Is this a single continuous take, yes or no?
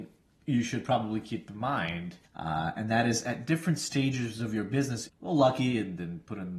no